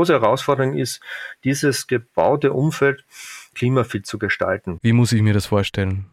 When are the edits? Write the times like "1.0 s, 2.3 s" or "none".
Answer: 3.5 s, 4.8 s